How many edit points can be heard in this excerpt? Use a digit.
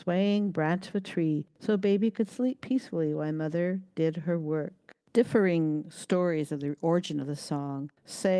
0